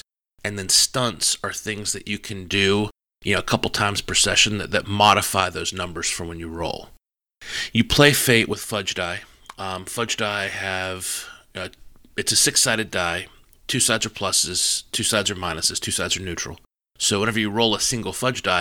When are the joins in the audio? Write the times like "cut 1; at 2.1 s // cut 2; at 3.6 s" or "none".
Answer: none